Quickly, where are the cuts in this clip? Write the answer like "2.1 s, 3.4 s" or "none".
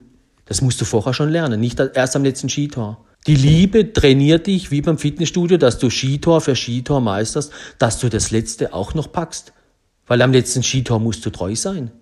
3.1 s